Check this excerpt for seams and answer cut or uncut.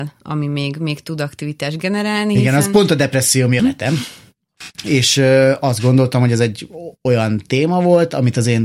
cut